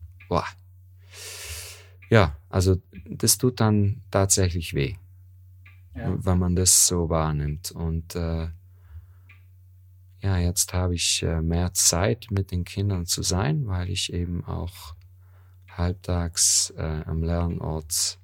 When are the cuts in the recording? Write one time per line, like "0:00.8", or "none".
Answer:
none